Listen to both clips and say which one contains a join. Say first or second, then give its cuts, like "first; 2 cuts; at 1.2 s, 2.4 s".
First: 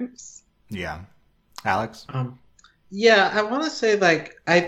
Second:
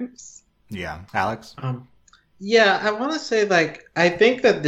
second; 1 cut; at 1.1 s